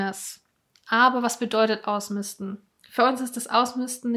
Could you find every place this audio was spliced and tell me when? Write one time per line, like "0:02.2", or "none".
none

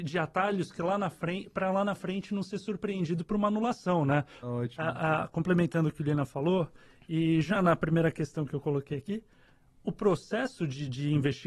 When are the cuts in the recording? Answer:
0:04.4
0:07.6

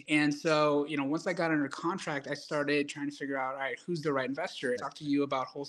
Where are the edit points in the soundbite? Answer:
0:04.8

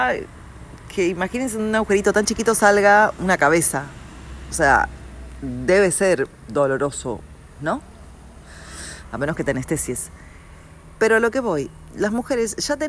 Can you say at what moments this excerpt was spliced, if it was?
none

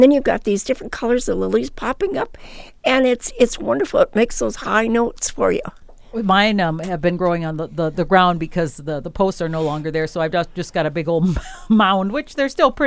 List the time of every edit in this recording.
none

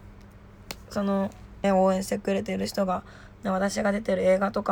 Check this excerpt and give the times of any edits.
0:01.6

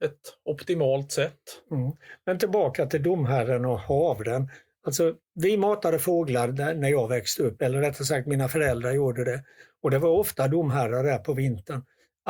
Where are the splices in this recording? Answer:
0:05.2

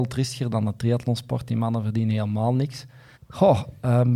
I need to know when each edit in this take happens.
0:03.1

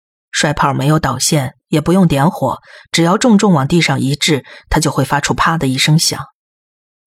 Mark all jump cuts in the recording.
none

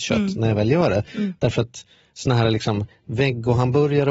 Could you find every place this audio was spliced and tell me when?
none

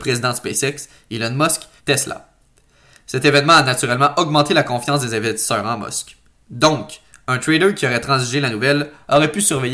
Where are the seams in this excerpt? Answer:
0:01.8

